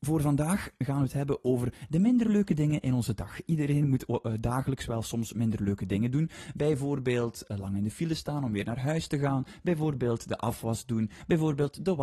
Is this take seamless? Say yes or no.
yes